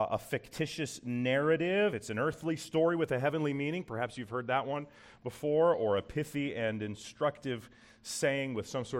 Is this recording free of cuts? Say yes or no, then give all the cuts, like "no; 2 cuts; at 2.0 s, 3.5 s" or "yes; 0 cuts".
yes; 0 cuts